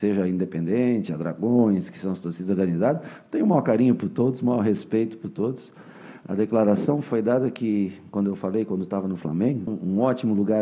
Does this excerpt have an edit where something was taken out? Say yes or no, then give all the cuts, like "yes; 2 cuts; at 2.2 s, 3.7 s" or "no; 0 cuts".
yes; 1 cut; at 9.7 s